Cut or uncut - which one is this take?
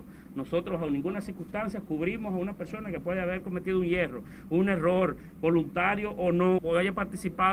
cut